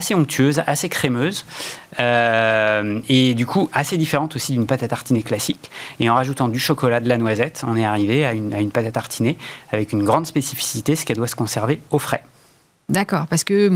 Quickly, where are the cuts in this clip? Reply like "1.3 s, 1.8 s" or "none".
none